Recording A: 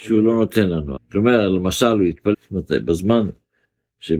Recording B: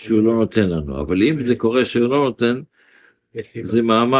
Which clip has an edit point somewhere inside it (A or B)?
A